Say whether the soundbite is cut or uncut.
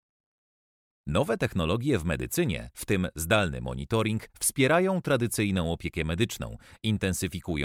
uncut